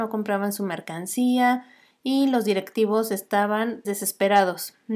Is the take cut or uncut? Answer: cut